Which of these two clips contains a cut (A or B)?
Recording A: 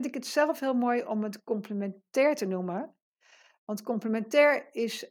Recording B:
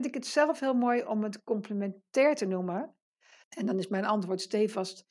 B